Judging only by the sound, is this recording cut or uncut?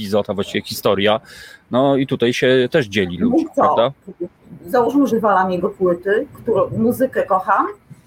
cut